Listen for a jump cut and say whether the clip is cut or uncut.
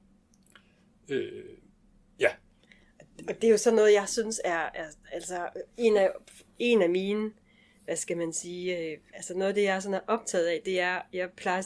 uncut